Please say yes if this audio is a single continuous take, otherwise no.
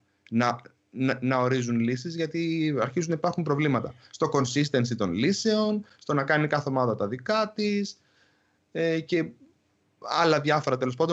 yes